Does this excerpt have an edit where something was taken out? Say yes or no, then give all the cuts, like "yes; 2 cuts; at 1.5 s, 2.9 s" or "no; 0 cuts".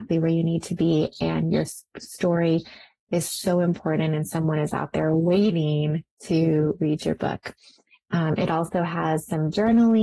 no; 0 cuts